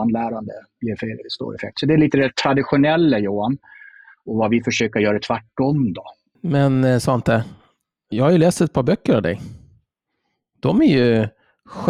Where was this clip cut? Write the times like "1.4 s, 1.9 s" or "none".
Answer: 8.1 s

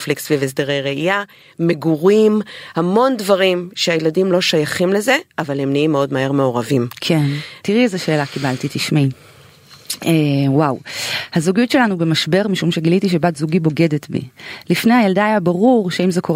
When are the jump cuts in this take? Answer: 7.6 s

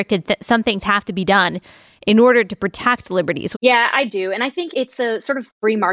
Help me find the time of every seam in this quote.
3.5 s, 4.7 s

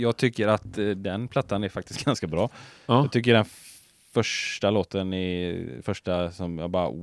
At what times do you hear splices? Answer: none

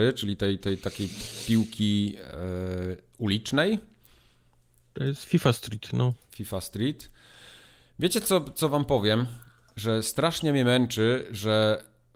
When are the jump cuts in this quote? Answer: none

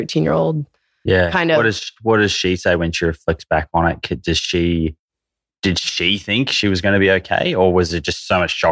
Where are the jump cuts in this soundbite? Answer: none

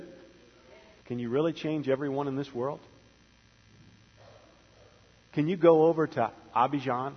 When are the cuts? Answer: 1.0 s

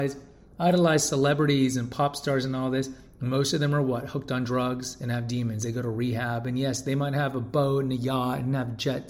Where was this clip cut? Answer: none

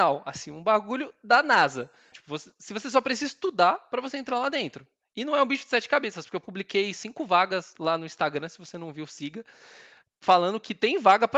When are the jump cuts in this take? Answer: 2.1 s

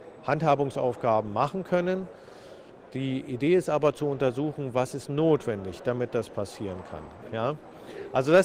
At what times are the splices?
7.2 s

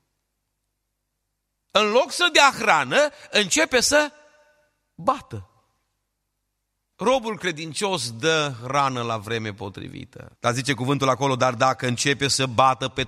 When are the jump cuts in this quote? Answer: 6.9 s, 10.4 s

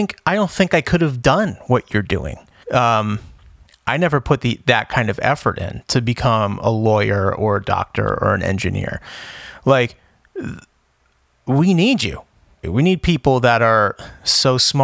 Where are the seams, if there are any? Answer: 2.6 s, 12.6 s

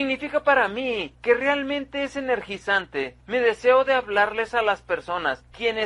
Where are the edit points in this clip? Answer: none

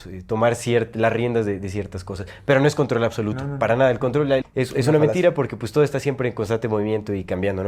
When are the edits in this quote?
4.4 s

